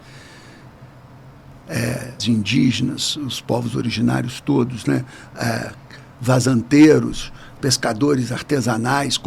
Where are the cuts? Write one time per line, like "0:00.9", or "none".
0:02.2